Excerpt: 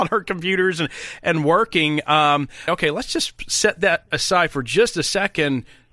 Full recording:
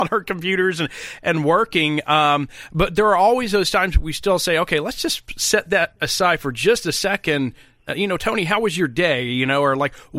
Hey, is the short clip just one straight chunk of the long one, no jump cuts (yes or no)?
no